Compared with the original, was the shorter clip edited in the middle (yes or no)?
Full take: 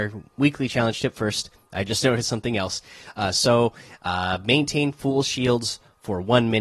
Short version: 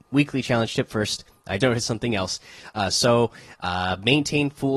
yes